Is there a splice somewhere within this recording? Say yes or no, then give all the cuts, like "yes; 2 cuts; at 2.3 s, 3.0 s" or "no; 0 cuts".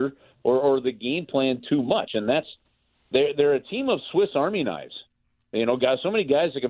no; 0 cuts